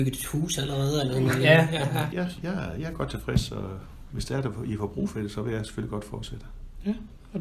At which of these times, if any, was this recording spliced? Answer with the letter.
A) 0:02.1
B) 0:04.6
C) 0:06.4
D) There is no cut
A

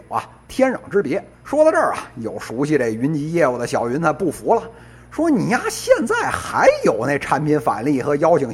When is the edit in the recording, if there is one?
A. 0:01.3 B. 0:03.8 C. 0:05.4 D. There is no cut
A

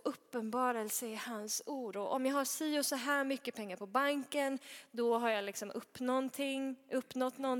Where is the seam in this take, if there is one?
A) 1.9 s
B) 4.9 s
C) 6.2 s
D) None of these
A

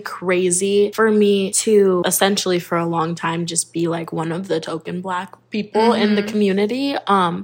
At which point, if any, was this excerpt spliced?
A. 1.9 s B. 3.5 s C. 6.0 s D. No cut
D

